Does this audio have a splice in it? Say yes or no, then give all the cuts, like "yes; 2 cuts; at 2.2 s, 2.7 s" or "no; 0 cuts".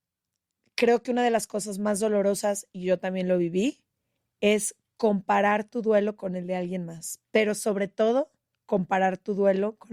no; 0 cuts